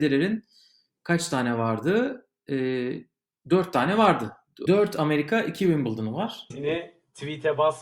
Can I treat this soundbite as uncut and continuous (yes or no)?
no